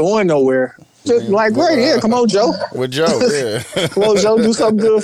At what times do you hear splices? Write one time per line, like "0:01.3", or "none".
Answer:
0:01.0